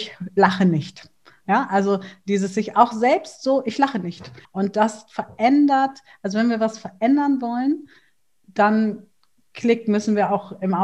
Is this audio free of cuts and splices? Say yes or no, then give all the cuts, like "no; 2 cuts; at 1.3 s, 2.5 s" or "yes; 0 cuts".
no; 1 cut; at 4.4 s